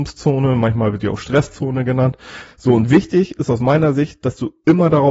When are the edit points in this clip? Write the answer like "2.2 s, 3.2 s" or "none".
2.5 s